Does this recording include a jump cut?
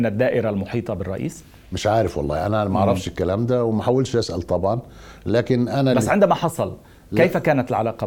no; 0 cuts

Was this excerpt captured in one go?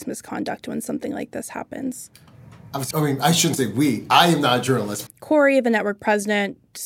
no; 2 cuts; at 2.9 s, 5.1 s

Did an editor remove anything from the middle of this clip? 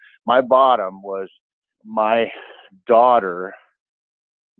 yes; 1 cut; at 1.7 s

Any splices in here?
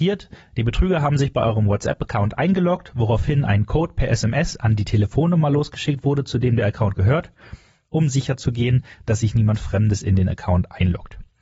no; 0 cuts

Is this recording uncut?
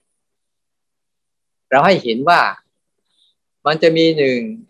yes; 0 cuts

